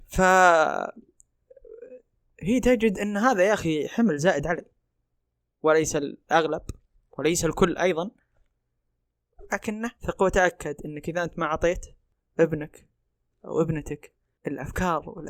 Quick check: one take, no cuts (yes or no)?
no